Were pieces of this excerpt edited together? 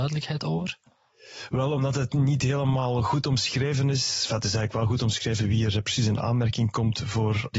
no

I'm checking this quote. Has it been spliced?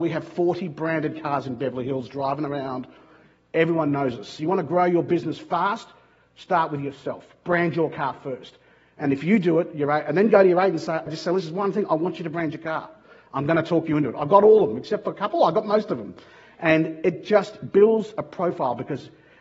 yes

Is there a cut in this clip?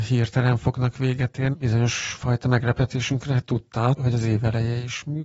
yes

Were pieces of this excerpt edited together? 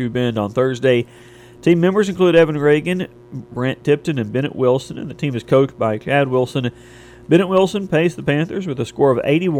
yes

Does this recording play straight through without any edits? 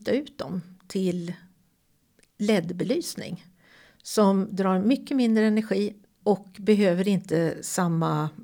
no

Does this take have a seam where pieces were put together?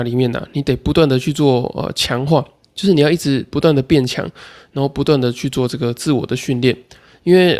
no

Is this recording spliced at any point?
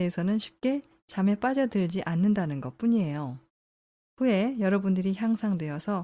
no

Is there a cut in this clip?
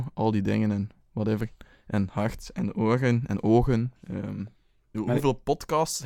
yes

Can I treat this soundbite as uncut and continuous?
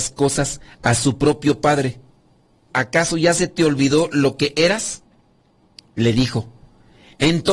no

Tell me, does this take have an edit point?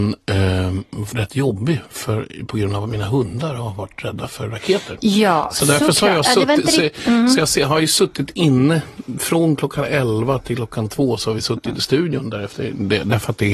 yes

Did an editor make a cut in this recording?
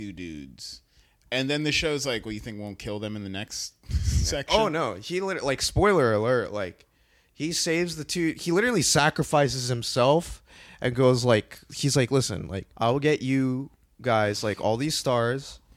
yes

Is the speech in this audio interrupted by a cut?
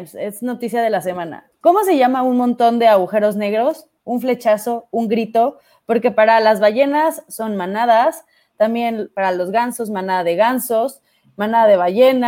no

